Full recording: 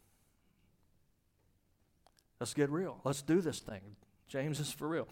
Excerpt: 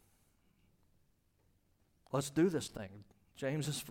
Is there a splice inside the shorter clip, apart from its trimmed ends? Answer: yes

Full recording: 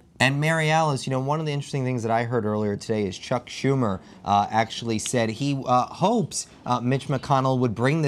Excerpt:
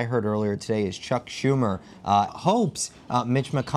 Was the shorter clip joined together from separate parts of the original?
yes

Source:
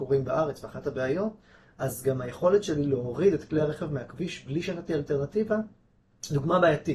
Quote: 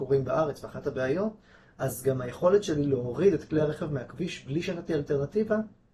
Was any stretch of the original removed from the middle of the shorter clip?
no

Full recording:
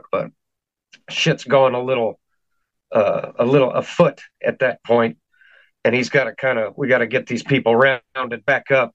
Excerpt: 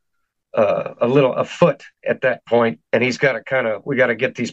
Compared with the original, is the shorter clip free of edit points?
no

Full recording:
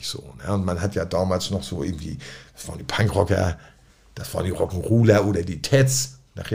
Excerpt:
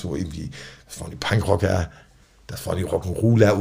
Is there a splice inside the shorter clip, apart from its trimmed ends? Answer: no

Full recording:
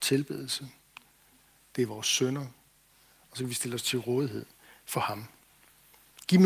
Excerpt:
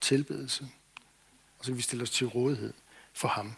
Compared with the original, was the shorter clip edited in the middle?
yes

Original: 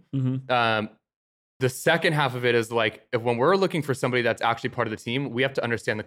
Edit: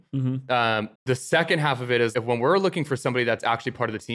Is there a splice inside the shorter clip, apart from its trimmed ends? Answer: yes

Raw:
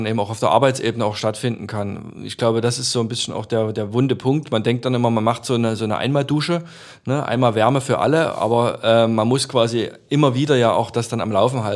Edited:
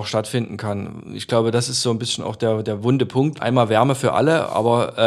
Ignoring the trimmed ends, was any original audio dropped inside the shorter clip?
yes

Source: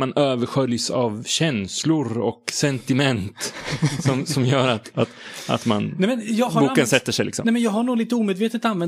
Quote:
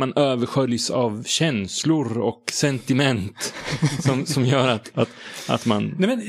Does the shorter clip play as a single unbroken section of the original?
yes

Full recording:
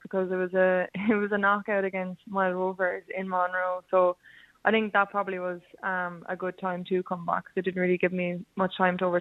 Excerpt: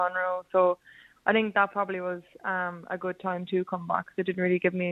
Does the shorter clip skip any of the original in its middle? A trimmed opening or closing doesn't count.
no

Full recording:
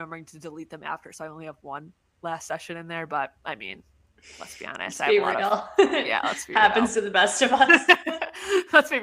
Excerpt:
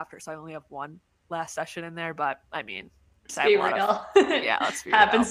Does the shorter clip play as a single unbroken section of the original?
no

